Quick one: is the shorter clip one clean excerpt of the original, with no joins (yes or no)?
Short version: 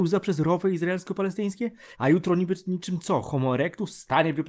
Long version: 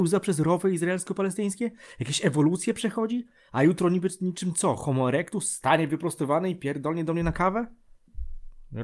no